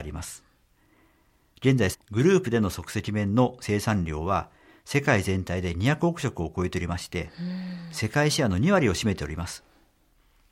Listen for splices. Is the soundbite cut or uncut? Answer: cut